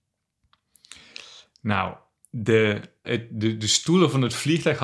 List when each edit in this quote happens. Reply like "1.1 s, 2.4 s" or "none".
3.0 s